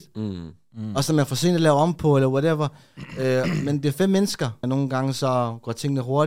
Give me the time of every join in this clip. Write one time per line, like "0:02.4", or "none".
0:04.6